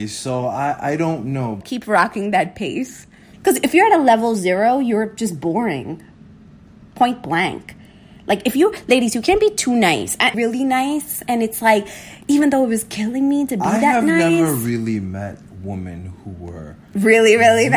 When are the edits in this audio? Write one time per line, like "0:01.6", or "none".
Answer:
0:01.6
0:03.3
0:10.3